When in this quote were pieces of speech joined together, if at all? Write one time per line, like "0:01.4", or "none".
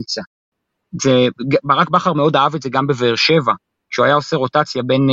none